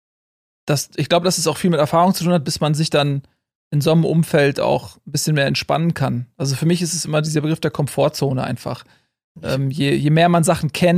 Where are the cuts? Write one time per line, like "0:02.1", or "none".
none